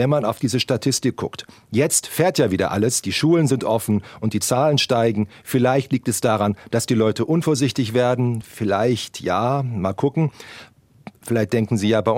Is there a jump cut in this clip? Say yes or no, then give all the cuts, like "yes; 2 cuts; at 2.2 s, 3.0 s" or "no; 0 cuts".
no; 0 cuts